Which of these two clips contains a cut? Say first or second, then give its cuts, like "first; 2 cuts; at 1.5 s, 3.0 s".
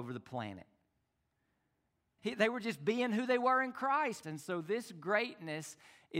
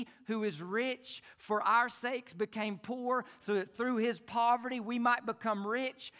first; 2 cuts; at 2.2 s, 4.2 s